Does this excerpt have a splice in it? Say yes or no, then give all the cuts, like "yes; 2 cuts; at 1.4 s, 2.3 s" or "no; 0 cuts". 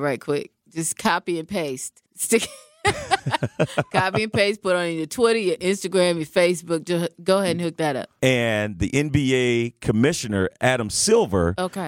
yes; 2 cuts; at 2.1 s, 8.2 s